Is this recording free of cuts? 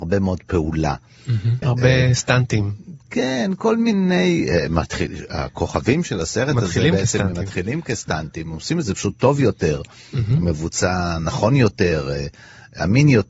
no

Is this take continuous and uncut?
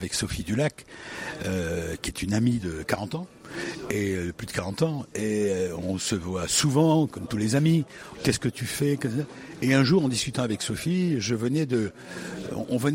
no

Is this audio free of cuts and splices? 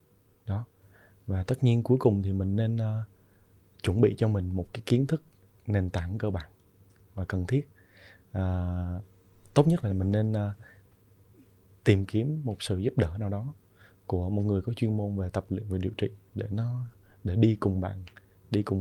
no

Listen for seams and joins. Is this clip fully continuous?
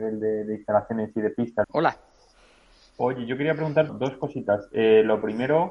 no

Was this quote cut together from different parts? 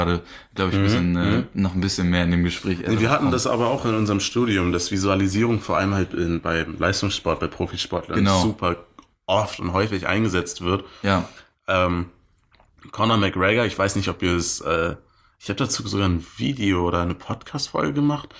no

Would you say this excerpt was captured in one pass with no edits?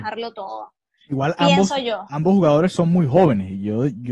yes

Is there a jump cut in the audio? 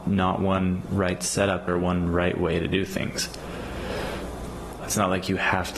yes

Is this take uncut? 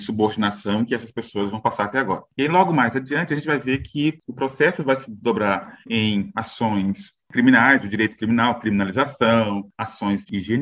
yes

